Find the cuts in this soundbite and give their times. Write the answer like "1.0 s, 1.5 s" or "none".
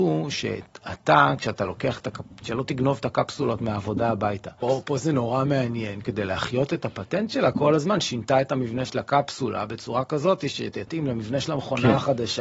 4.6 s, 6.0 s

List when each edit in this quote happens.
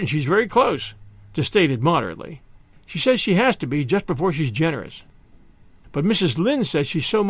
none

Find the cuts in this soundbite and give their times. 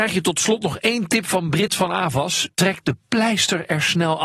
2.5 s

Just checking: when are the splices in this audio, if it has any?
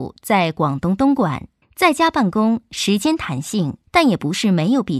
1.6 s, 3.9 s

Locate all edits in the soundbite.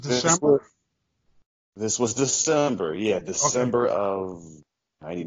none

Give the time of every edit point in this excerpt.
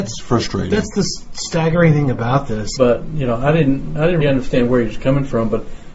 2.8 s, 4.2 s

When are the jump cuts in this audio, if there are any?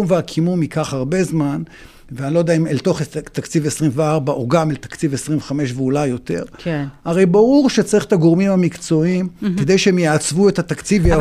none

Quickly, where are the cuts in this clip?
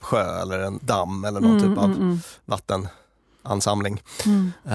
none

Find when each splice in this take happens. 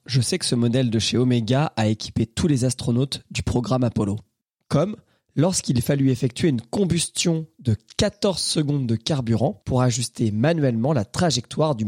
4.6 s, 9.6 s

